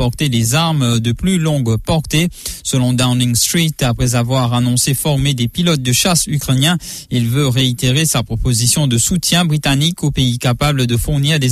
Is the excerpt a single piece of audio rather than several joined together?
yes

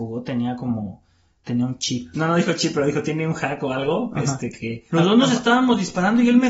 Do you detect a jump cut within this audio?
yes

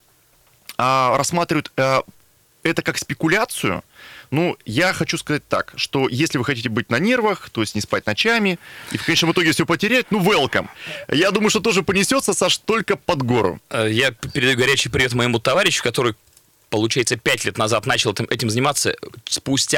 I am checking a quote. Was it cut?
no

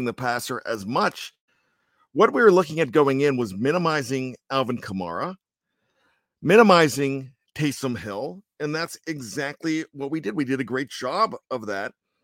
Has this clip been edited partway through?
no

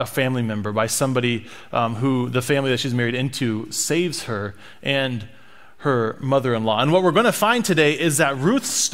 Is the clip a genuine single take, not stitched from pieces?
yes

